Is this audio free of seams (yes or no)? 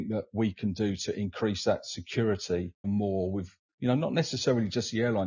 no